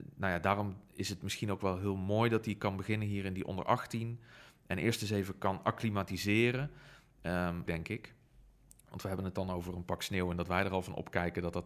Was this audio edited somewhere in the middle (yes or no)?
yes